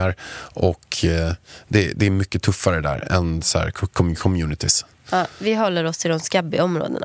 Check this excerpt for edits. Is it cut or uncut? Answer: uncut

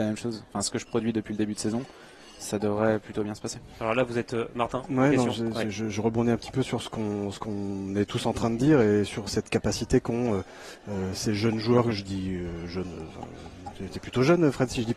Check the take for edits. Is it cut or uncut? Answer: uncut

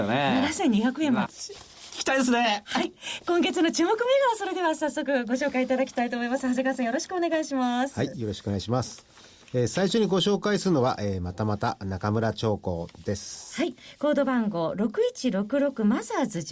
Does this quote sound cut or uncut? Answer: cut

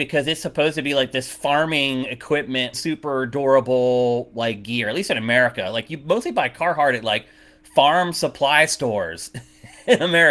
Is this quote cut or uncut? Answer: cut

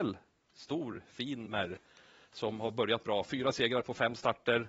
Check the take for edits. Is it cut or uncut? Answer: cut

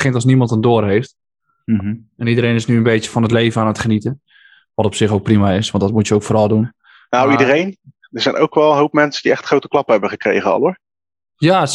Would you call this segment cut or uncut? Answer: uncut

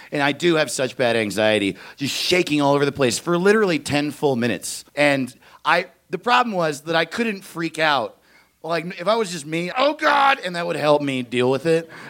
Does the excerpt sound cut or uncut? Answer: cut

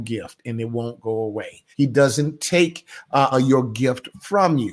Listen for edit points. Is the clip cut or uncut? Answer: cut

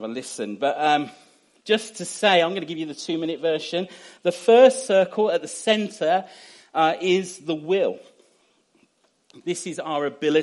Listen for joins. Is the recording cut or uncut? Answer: cut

